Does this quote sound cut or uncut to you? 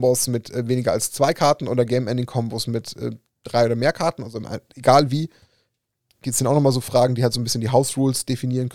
uncut